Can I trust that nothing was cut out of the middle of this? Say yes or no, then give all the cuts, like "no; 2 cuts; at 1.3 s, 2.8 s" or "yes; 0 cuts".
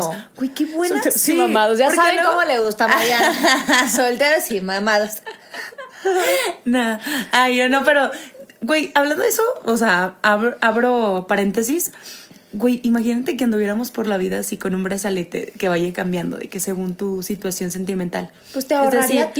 yes; 0 cuts